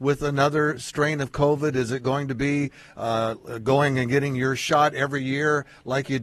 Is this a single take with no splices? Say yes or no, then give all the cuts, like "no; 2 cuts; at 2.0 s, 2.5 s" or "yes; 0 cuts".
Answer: yes; 0 cuts